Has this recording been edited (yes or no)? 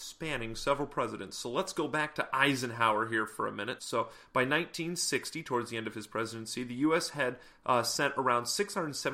yes